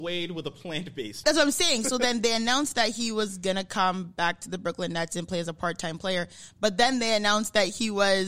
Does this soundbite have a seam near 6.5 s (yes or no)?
no